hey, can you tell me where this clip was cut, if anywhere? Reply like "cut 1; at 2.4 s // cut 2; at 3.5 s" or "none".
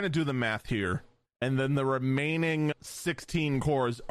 cut 1; at 1.3 s // cut 2; at 2.7 s